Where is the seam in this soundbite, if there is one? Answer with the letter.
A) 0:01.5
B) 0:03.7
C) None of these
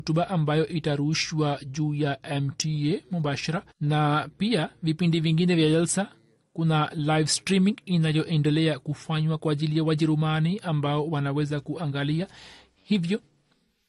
B